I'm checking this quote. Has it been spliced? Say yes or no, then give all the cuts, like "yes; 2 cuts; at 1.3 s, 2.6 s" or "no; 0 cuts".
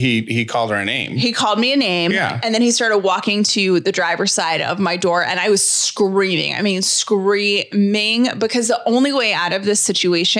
no; 0 cuts